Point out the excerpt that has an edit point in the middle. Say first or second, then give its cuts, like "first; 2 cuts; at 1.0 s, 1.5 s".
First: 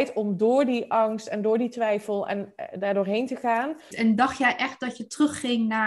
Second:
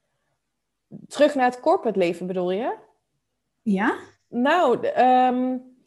first; 1 cut; at 3.9 s